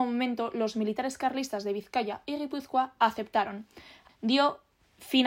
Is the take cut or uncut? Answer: cut